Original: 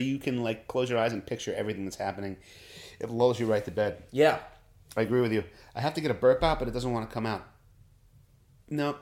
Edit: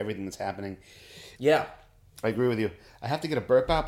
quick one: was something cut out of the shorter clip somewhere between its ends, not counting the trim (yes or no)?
yes